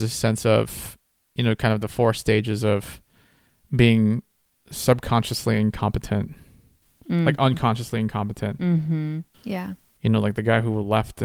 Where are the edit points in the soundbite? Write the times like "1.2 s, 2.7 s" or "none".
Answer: 9.3 s